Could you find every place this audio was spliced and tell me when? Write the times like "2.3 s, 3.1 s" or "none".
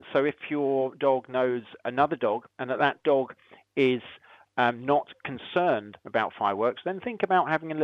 none